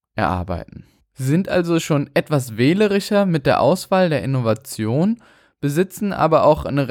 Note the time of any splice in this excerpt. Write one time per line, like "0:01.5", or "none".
none